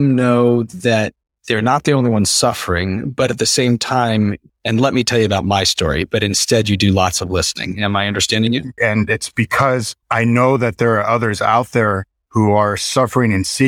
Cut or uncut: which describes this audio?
cut